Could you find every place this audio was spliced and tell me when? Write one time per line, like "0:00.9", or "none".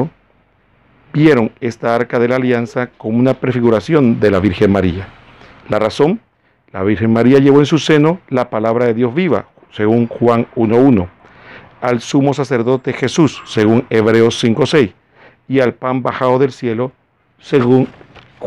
none